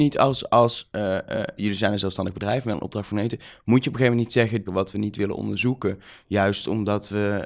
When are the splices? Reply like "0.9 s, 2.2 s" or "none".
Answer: 1.6 s, 4.7 s